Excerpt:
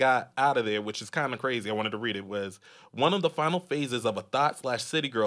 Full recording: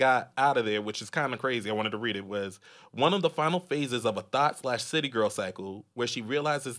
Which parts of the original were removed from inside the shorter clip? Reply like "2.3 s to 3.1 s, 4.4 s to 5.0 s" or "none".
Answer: none